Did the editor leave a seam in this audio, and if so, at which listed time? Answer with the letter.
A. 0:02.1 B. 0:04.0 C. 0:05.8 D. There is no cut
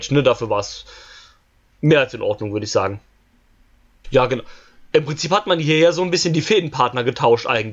B